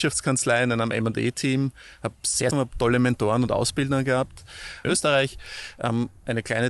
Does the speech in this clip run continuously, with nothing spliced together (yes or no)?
no